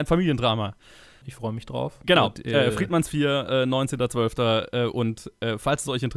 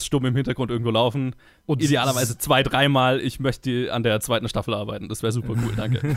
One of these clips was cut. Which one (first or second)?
first